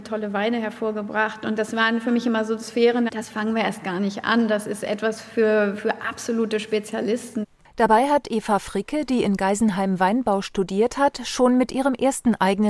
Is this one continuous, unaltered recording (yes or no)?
no